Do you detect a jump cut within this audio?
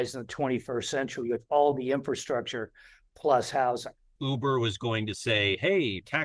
yes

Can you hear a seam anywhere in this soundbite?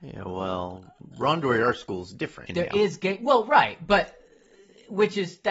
yes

